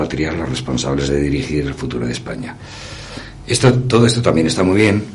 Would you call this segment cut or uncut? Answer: uncut